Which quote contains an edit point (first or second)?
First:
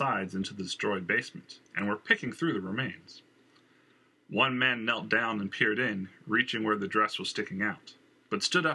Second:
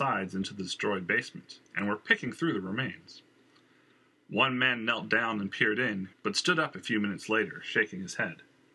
second